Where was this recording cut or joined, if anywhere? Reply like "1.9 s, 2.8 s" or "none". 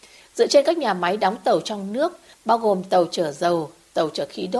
2.3 s